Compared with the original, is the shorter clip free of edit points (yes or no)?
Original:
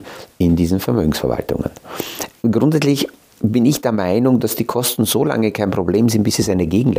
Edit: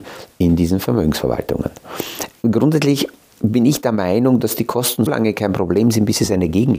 no